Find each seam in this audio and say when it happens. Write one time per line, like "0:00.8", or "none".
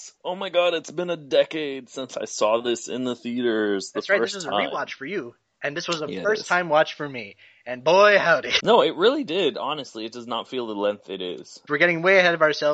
0:08.6
0:11.7